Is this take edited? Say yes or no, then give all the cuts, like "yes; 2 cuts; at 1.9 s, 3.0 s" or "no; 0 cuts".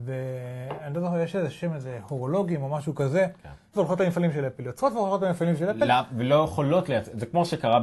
yes; 1 cut; at 3.7 s